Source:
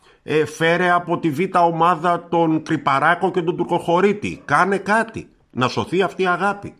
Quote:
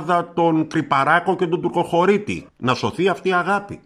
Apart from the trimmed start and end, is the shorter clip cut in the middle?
yes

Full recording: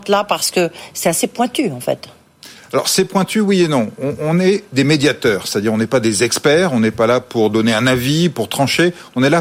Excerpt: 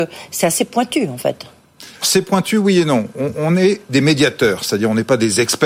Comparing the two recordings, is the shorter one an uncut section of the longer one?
no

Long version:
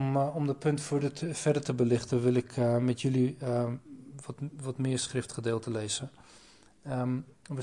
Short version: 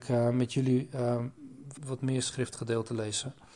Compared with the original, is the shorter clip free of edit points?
no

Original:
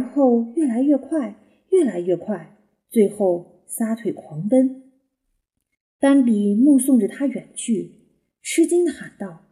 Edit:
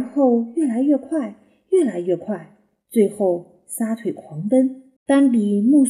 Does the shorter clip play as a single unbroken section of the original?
no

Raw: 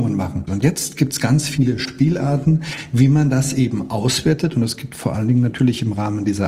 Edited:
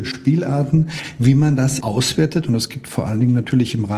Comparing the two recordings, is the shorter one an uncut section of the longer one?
no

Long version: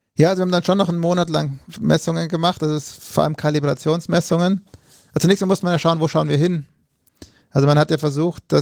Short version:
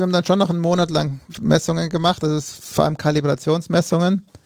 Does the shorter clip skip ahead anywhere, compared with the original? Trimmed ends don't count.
no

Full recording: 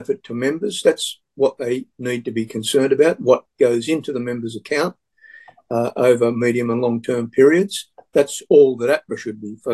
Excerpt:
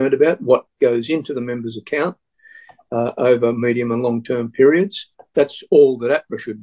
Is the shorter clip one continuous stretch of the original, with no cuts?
yes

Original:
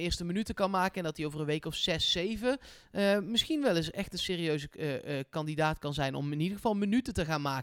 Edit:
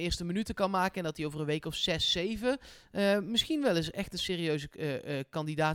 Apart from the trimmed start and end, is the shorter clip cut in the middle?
no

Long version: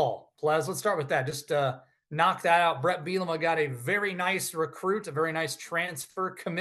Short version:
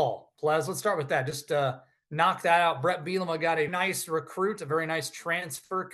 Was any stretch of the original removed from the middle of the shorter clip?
yes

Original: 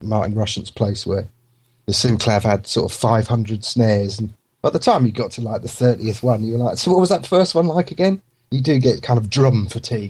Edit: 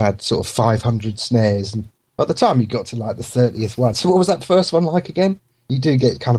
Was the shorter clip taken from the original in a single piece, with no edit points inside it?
no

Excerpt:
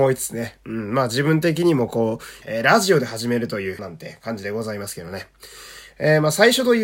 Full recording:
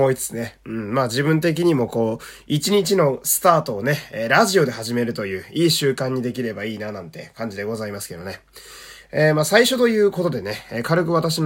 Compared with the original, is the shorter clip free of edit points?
no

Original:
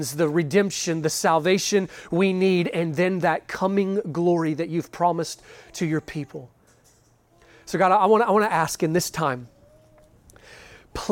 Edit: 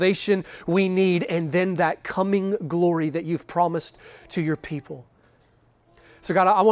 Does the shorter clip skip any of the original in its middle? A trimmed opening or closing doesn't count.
no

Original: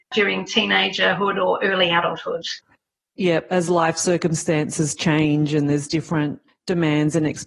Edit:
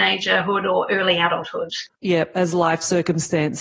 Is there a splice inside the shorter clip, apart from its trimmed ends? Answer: yes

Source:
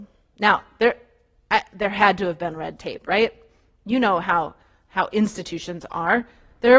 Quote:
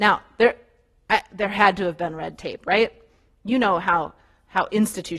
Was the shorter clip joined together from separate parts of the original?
no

